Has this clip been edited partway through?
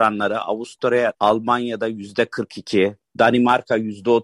yes; 2 cuts; at 1.1 s, 3.0 s

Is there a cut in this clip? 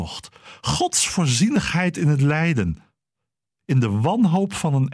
yes; 1 cut; at 3.5 s

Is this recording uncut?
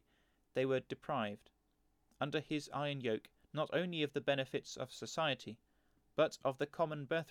yes; 0 cuts

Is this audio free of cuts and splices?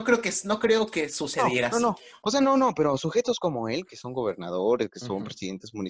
no; 2 cuts; at 2.2 s, 3.8 s

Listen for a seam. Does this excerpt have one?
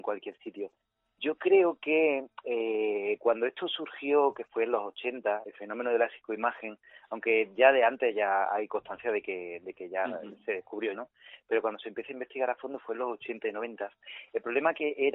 yes; 2 cuts; at 5.4 s, 10.9 s

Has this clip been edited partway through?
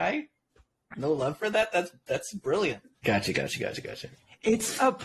yes; 1 cut; at 3.0 s

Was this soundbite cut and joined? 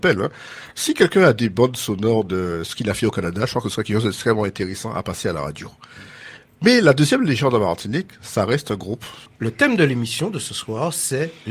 yes; 1 cut; at 9.3 s

